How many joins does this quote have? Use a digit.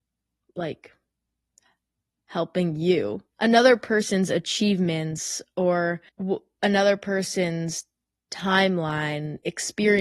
2